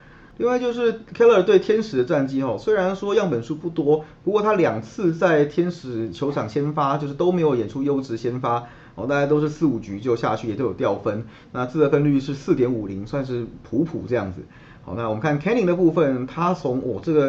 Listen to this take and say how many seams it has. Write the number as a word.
zero